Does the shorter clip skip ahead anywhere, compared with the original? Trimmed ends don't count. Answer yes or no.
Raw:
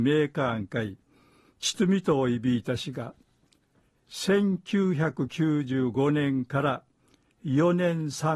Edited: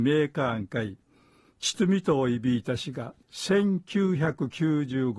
yes